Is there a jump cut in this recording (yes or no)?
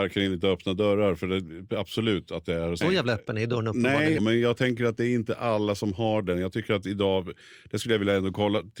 yes